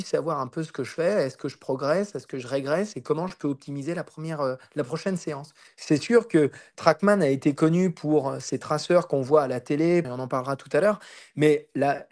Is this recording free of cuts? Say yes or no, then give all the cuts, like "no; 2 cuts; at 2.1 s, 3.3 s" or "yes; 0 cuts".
no; 2 cuts; at 5.7 s, 10.0 s